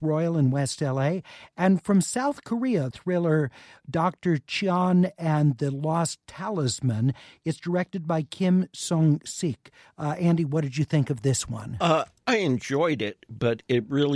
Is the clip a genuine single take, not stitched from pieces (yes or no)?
no